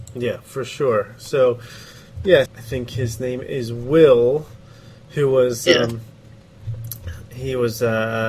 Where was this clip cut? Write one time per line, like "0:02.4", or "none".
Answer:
0:02.5